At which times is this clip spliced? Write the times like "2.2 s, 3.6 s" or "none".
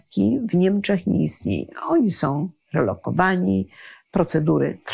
none